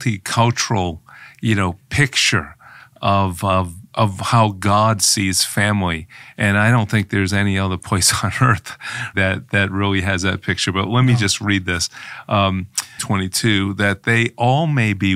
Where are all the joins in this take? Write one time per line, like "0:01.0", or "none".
0:09.1
0:13.0